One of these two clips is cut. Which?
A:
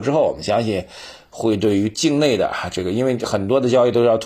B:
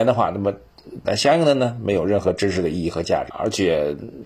B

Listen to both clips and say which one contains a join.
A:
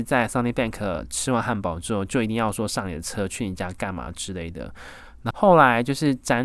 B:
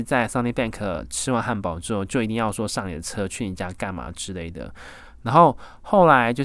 A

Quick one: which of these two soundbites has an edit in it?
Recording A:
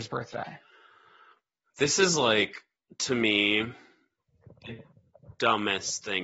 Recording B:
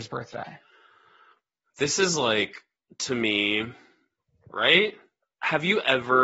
B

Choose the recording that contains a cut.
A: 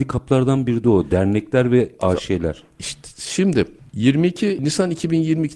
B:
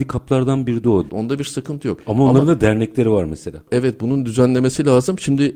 B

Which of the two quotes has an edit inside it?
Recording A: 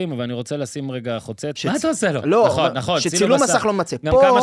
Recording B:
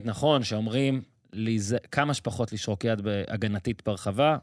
A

